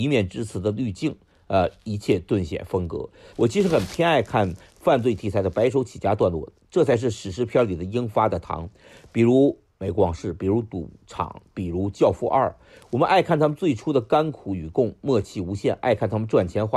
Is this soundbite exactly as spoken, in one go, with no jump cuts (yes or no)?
no